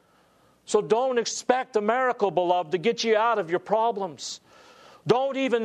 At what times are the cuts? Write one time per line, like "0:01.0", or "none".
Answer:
none